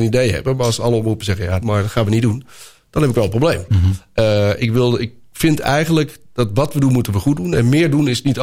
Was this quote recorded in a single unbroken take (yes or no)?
no